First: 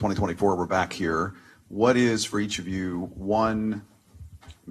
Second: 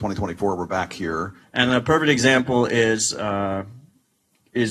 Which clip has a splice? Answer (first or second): second